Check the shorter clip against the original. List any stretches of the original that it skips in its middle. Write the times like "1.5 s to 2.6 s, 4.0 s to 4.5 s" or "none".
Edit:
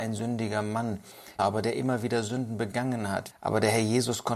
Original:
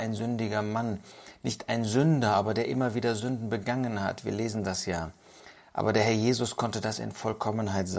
1.4 s to 2.3 s, 4.2 s to 5.6 s